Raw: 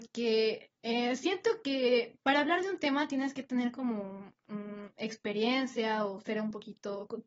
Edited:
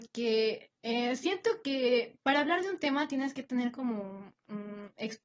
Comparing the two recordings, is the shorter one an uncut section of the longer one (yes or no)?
yes